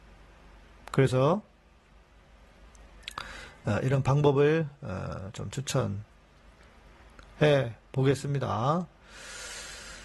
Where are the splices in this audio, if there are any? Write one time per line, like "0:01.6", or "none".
none